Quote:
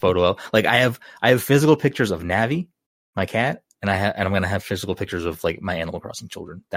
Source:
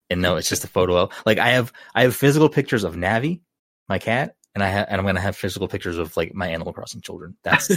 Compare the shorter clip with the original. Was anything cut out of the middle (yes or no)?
no